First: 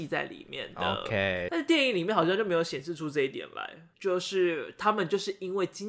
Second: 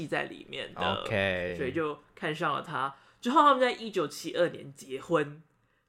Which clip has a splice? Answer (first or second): first